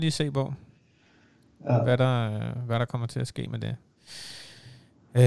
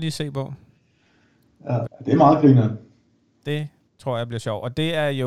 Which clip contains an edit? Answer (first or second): second